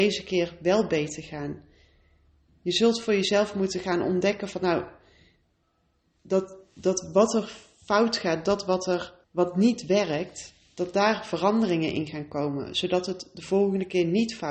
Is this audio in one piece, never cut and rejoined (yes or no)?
no